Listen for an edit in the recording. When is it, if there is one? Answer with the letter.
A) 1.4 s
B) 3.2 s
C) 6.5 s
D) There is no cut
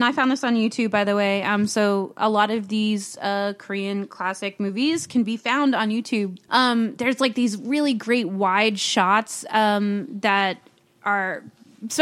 C